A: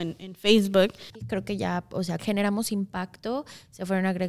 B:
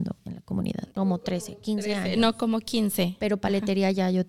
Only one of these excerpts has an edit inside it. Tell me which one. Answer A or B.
A